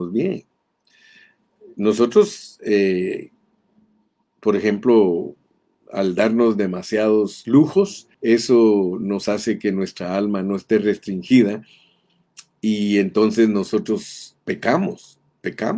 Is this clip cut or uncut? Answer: cut